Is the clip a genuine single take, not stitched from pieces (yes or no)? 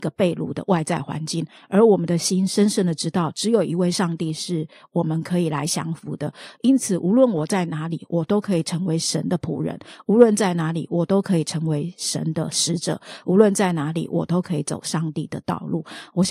yes